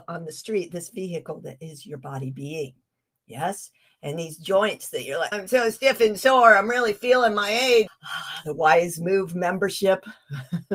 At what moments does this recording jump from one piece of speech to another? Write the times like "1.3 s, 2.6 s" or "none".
5.3 s, 7.9 s

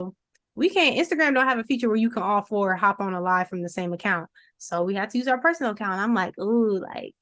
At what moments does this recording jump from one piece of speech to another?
none

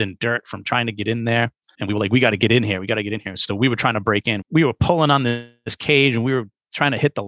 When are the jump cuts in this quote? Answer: 1.7 s

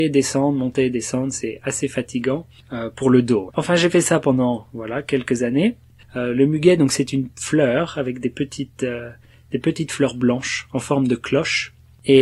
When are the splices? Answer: 3.5 s, 6.0 s

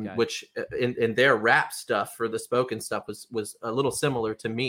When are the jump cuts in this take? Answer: none

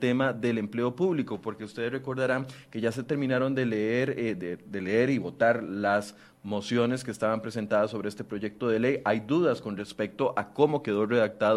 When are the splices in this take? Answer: none

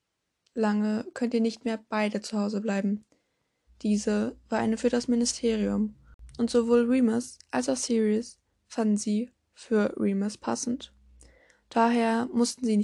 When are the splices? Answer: 3.7 s

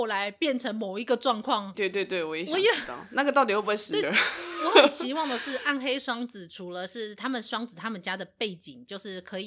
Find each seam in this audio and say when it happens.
1.7 s, 4.0 s

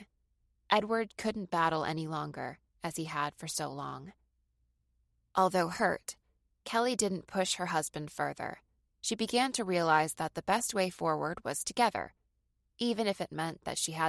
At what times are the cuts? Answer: 1.1 s, 8.9 s

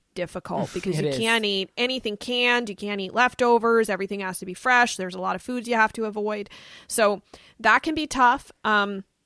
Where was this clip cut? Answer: none

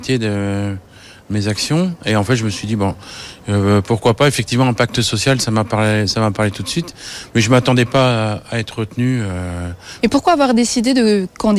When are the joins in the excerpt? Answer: 10.0 s

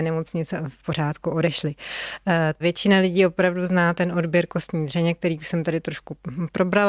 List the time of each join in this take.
2.6 s

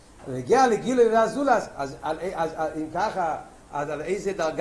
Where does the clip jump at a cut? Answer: none

